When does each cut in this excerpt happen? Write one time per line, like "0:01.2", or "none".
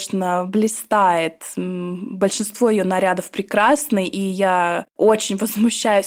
none